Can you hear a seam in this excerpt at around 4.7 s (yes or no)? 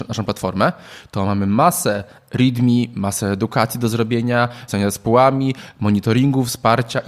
yes